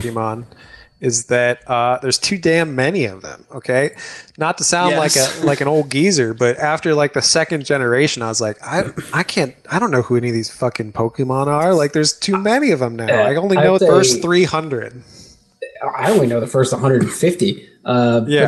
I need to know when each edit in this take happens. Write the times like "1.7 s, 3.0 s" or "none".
13.8 s